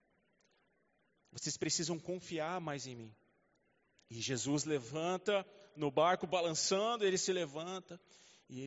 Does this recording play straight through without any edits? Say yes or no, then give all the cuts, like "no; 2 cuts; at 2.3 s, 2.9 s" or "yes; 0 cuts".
no; 1 cut; at 1.2 s